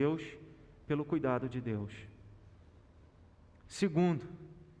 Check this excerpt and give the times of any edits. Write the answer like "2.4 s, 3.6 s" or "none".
none